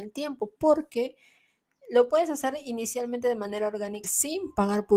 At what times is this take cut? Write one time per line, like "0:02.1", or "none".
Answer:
0:04.0